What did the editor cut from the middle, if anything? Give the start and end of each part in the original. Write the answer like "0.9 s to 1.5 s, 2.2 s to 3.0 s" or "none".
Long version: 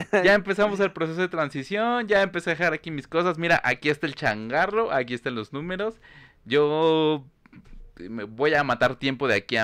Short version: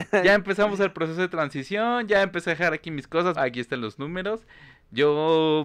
3.4 s to 4.9 s